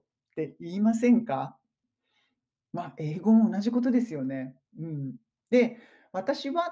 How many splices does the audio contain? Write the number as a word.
zero